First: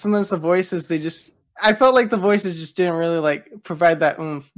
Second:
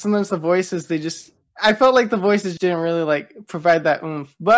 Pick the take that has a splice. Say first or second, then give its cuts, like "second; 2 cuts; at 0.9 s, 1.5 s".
second; 1 cut; at 2.6 s